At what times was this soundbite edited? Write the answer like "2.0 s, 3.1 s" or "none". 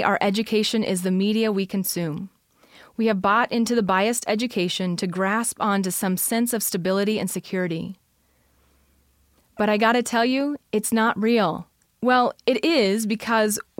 11.9 s